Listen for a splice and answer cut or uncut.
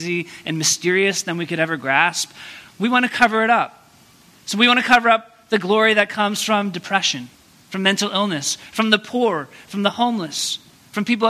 uncut